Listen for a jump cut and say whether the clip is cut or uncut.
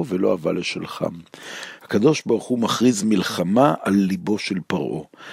cut